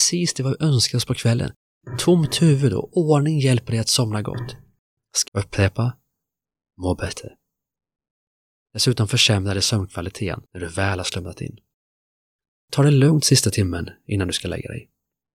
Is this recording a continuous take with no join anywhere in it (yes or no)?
no